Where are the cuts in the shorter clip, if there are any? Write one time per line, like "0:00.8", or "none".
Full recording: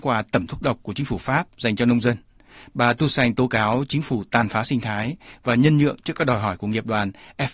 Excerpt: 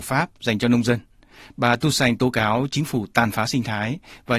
none